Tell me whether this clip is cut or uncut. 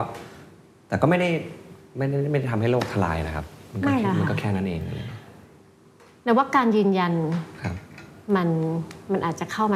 uncut